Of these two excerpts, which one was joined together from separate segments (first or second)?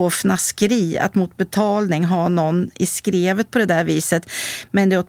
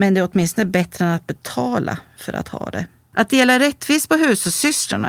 second